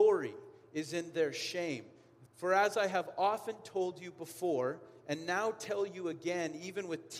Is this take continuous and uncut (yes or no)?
no